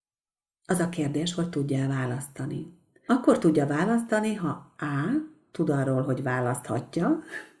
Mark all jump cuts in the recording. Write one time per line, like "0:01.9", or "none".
none